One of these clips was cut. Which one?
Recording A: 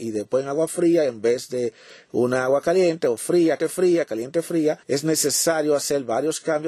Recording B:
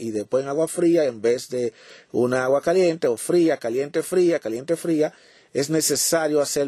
A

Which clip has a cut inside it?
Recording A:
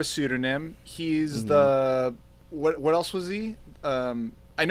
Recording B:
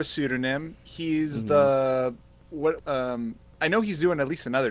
B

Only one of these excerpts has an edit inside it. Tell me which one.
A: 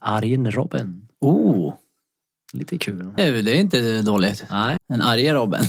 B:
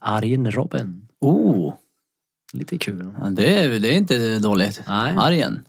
A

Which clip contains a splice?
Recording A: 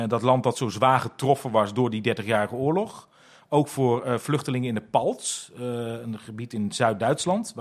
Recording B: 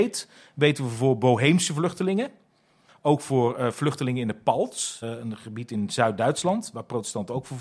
B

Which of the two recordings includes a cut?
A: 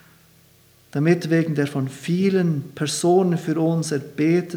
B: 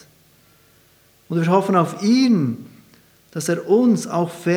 B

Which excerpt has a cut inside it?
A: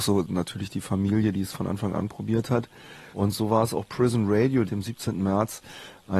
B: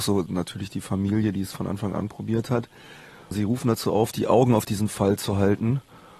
A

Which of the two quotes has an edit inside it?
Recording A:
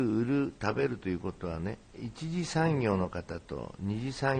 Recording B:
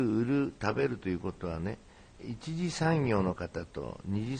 A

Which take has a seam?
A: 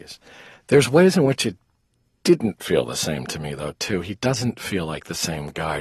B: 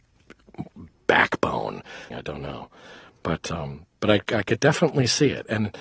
B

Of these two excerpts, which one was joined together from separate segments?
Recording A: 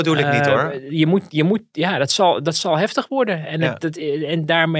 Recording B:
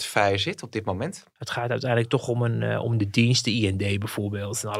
B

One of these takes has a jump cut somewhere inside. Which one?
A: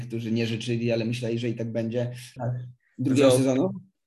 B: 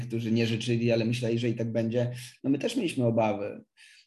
A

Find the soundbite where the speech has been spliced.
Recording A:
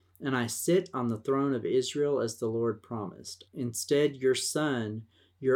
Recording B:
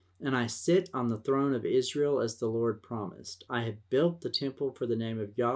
A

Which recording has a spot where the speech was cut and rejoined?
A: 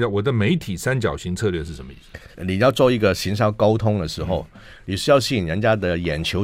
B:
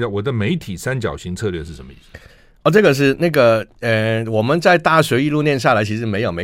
A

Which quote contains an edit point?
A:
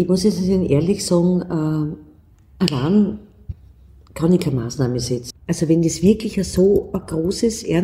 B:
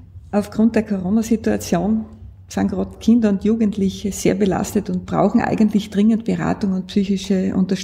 A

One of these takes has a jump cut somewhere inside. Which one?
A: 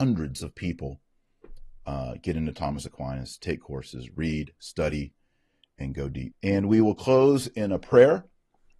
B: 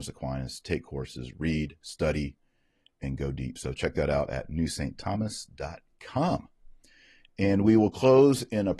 A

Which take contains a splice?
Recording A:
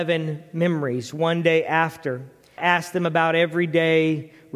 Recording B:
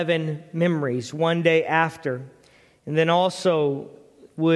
A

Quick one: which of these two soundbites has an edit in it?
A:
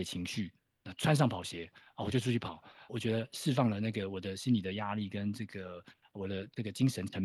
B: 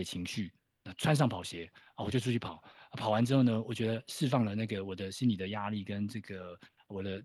A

